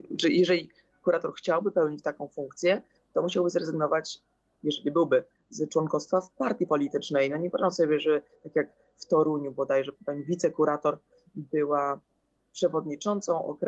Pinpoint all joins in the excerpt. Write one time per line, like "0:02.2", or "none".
0:09.9